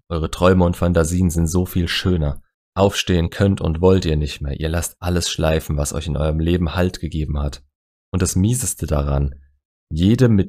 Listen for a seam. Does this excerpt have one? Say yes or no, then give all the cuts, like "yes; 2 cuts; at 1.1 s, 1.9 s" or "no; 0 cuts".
no; 0 cuts